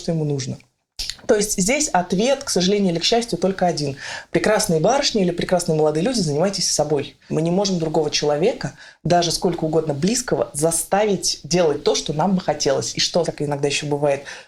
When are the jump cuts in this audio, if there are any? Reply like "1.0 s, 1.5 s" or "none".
7.3 s, 13.2 s